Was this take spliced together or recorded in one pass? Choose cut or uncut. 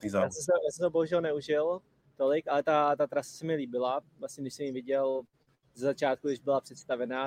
uncut